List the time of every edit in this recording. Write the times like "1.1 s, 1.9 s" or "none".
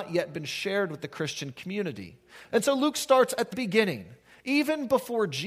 2.5 s, 3.5 s

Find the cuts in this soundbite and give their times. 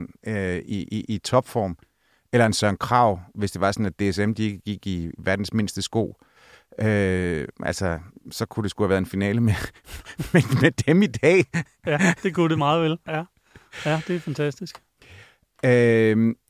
none

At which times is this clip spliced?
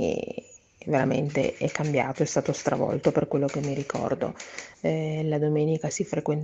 4.7 s

